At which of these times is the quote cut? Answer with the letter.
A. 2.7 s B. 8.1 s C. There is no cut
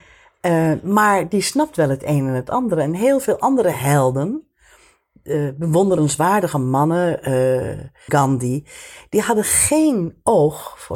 B